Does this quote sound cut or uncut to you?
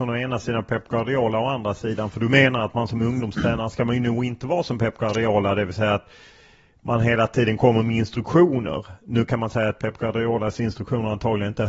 uncut